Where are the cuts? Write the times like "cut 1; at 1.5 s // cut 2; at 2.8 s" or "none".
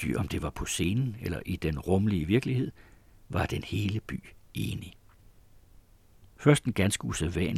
cut 1; at 6.2 s

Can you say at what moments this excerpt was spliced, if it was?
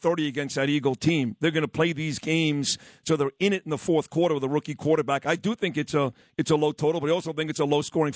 none

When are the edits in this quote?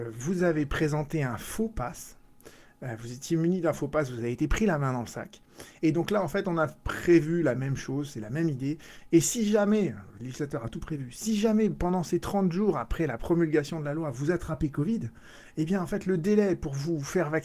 cut 1; at 5.8 s // cut 2; at 9.1 s

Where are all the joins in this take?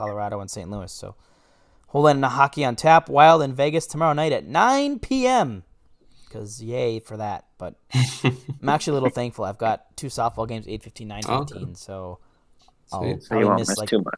none

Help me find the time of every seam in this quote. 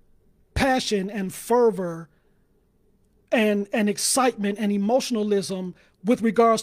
none

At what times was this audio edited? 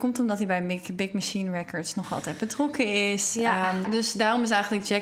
cut 1; at 3.8 s

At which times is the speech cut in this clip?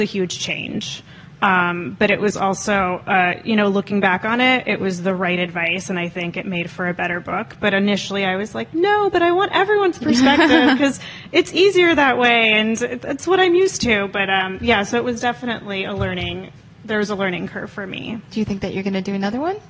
none

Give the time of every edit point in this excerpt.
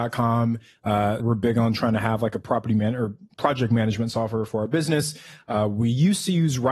cut 1; at 1.2 s

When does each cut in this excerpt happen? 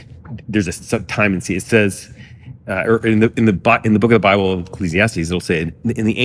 none

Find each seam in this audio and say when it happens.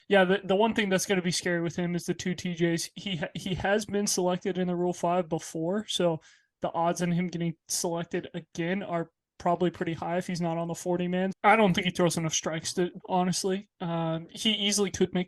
cut 1; at 11.3 s // cut 2; at 13.0 s

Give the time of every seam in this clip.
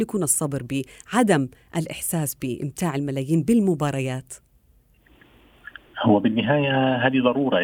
none

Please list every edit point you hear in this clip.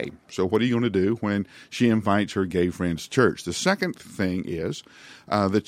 none

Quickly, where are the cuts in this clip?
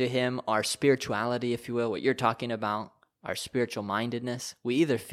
none

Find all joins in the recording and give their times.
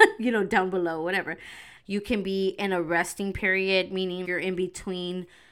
cut 1; at 1.8 s // cut 2; at 4.2 s

